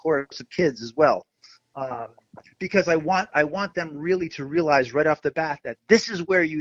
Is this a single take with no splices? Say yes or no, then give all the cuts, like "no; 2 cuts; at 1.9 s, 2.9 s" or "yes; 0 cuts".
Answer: yes; 0 cuts